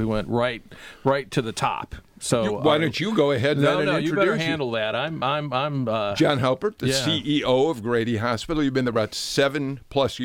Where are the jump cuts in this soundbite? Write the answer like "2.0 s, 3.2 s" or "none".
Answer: none